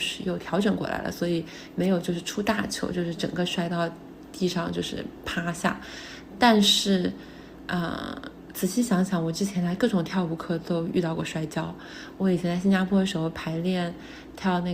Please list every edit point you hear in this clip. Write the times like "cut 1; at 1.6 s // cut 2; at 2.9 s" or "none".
none